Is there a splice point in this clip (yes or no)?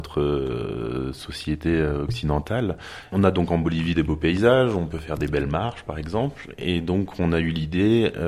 yes